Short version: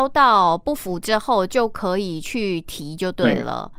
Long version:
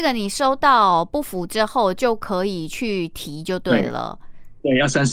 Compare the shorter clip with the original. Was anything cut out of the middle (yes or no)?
no